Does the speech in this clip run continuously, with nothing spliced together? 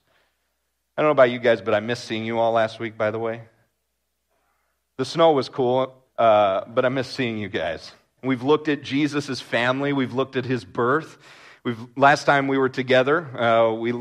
no; 2 cuts; at 6.1 s, 8.2 s

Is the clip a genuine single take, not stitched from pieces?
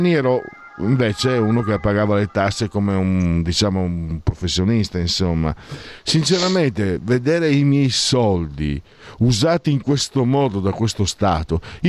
yes; 0 cuts

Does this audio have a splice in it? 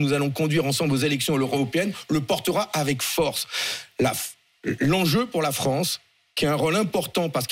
no; 0 cuts

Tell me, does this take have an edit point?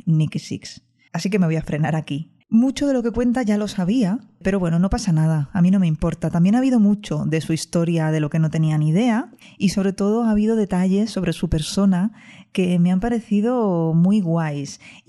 yes; 2 cuts; at 1.1 s, 2.4 s

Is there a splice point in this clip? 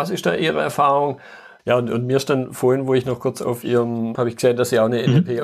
yes; 2 cuts; at 1.6 s, 4.1 s

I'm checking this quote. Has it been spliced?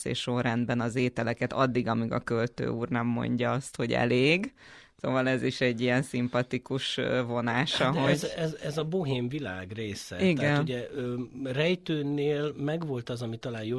no; 0 cuts

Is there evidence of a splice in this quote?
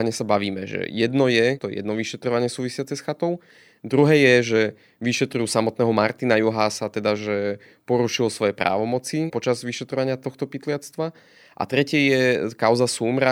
yes; 1 cut; at 1.6 s

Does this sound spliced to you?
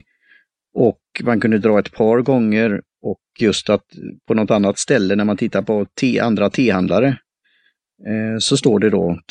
no; 0 cuts

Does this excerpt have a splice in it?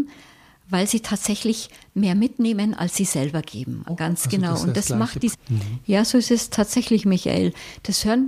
yes; 2 cuts; at 3.9 s, 5.3 s

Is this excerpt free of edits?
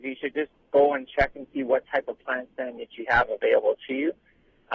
yes; 0 cuts

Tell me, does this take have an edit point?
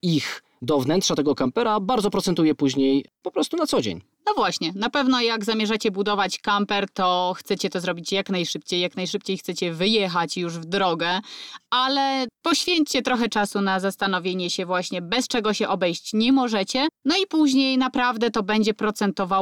no; 0 cuts

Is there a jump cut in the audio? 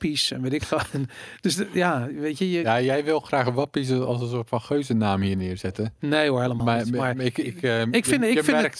no; 0 cuts

